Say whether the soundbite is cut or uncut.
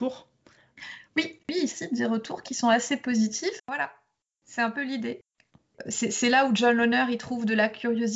cut